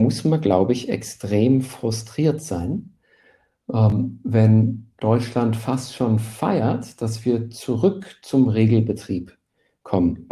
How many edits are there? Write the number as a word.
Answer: zero